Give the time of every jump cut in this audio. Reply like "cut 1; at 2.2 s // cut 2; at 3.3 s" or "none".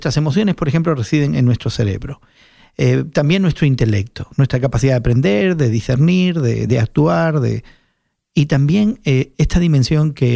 none